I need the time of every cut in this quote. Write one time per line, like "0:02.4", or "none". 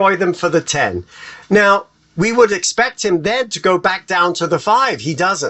none